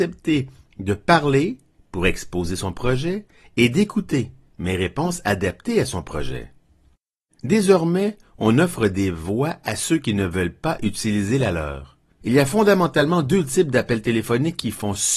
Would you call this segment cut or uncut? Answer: cut